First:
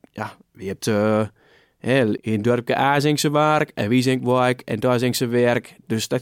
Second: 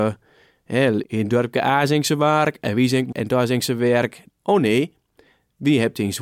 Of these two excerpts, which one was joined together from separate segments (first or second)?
second